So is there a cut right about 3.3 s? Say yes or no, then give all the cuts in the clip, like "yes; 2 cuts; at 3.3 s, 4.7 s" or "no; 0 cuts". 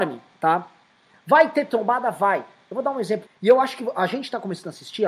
yes; 1 cut; at 3.3 s